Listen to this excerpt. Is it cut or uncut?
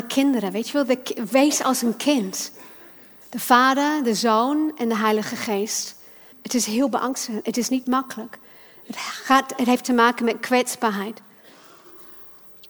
cut